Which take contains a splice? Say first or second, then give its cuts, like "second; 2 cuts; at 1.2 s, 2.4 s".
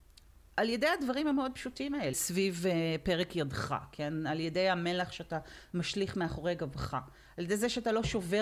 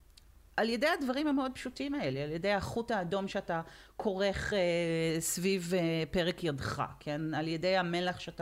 first; 1 cut; at 2.1 s